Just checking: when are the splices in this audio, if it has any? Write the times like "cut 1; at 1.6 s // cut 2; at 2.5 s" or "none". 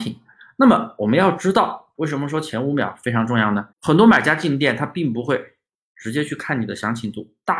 cut 1; at 1.9 s // cut 2; at 3.7 s